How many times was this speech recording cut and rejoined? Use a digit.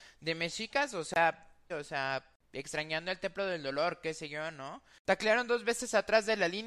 1